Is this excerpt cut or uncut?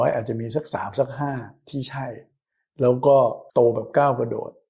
cut